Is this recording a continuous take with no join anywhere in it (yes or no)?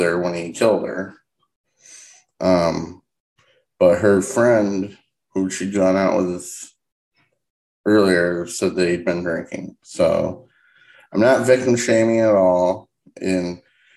yes